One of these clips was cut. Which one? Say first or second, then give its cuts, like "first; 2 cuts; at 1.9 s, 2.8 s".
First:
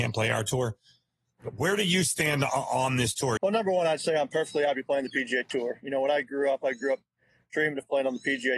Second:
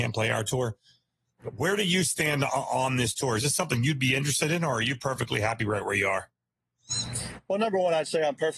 first; 1 cut; at 3.4 s